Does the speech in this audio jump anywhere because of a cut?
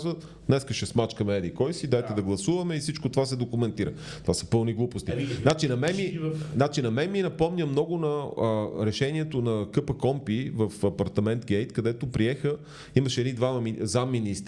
no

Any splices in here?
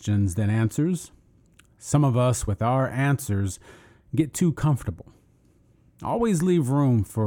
no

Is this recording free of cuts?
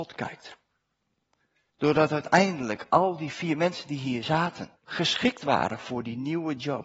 no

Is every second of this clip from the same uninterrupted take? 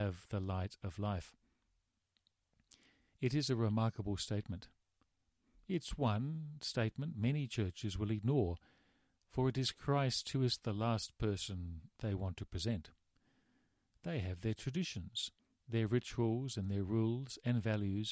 yes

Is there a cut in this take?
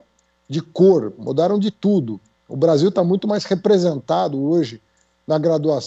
no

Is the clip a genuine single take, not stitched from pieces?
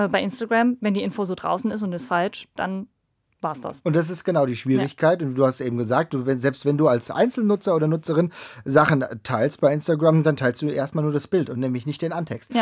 yes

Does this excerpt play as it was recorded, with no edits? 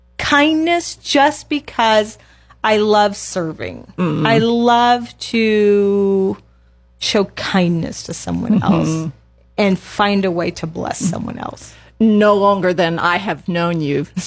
yes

